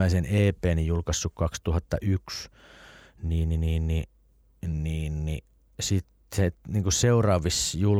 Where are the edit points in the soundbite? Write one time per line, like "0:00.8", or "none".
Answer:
none